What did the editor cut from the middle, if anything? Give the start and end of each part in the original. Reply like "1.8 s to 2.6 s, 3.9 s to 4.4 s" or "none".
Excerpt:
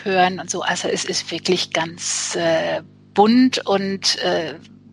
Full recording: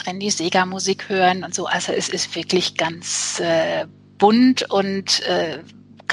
none